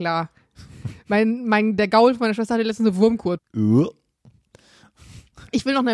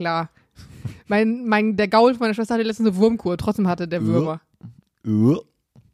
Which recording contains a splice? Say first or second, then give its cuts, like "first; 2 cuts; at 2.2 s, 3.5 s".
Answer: first; 1 cut; at 3.4 s